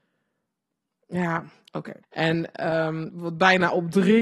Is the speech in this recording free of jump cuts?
no; 2 cuts; at 2.0 s, 3.1 s

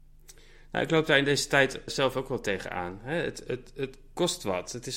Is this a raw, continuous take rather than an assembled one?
no; 1 cut; at 1.9 s

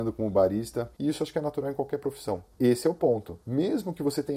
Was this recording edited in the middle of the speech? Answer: yes; 2 cuts; at 0.9 s, 2.5 s

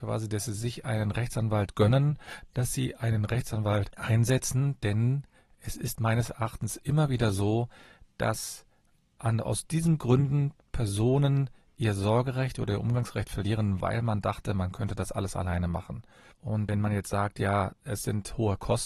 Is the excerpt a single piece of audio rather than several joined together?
no; 1 cut; at 13.8 s

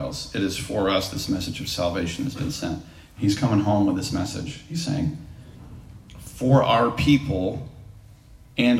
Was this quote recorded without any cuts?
no; 1 cut; at 3.2 s

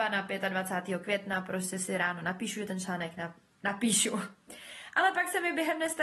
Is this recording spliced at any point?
no; 0 cuts

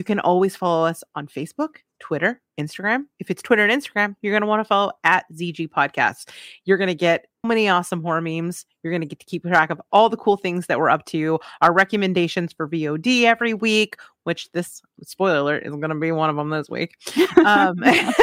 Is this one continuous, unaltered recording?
no; 1 cut; at 7.4 s

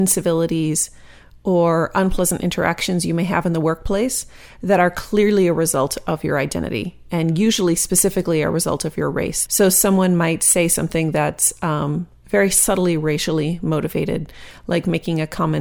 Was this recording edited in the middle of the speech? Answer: yes; 1 cut; at 9.5 s

